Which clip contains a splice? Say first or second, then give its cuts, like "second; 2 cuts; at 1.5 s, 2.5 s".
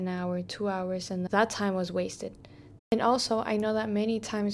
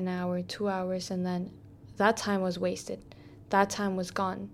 first; 2 cuts; at 1.3 s, 2.8 s